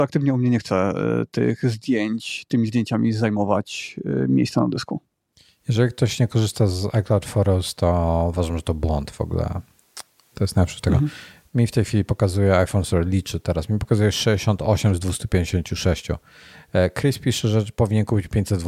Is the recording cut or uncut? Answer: uncut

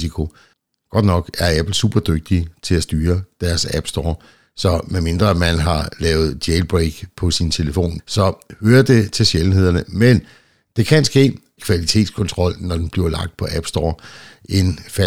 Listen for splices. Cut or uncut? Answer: cut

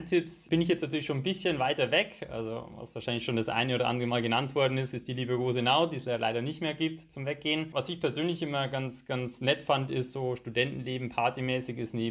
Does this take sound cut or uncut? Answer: uncut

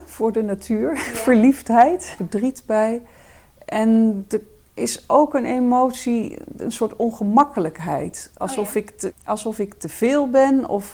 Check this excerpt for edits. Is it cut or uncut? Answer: cut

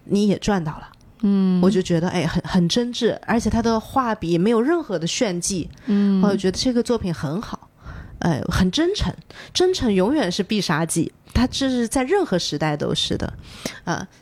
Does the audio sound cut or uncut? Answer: uncut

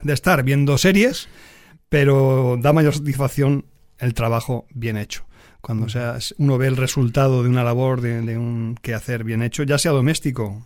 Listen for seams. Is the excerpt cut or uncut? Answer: uncut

